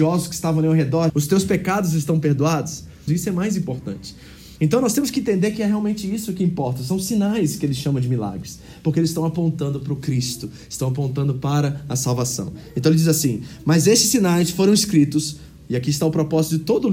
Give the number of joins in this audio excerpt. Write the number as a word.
two